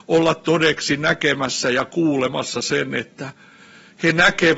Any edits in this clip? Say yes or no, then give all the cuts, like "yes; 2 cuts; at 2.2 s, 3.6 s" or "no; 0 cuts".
no; 0 cuts